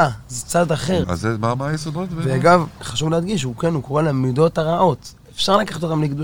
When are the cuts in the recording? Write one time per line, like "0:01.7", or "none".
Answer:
0:01.0